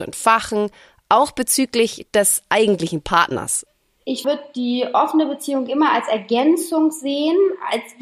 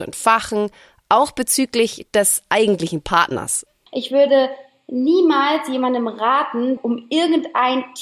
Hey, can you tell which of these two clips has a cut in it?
second; 2 cuts; at 3.9 s, 6.8 s

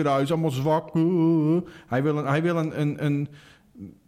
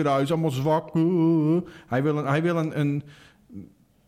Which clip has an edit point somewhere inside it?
second; 1 cut; at 2.7 s

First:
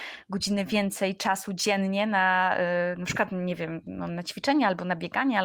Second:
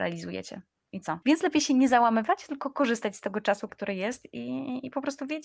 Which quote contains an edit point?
second; 2 cuts; at 1.2 s, 3.7 s

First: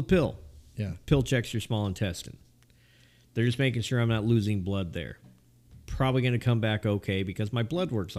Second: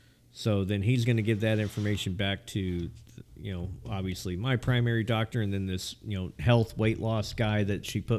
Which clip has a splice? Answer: second; 1 cut; at 6.4 s

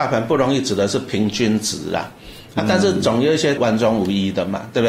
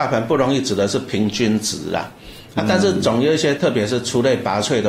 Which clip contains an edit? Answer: first; 1 cut; at 3.6 s

